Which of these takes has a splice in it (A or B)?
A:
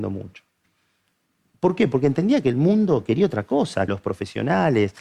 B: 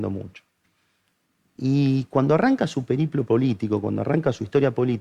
A